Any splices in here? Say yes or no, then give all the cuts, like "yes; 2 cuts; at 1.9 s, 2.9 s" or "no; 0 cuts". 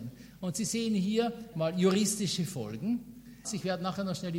yes; 2 cuts; at 1.5 s, 3.4 s